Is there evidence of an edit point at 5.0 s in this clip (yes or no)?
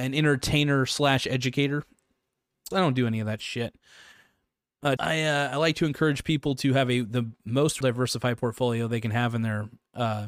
yes